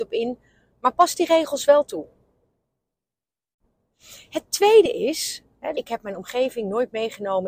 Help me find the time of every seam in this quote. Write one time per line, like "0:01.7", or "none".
0:05.7